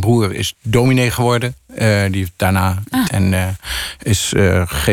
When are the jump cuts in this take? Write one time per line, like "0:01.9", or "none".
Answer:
0:03.1